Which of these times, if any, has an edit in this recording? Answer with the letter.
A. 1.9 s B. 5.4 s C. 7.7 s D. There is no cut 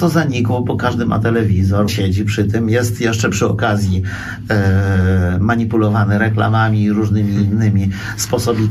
A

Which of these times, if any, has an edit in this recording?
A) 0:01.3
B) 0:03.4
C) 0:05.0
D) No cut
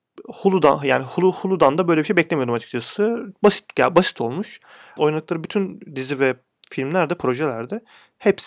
C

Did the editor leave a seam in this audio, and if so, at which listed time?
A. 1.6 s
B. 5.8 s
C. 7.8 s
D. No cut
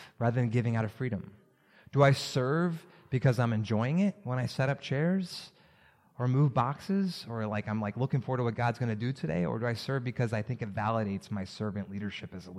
D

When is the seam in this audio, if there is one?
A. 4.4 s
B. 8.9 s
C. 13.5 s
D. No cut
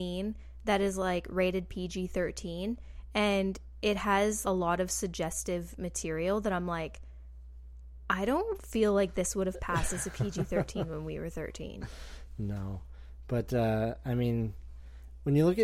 A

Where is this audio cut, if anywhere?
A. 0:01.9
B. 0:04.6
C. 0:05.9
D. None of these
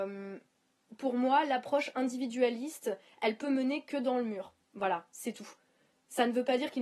D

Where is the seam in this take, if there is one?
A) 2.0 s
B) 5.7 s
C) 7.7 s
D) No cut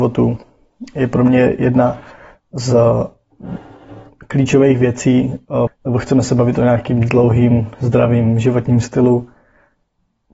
B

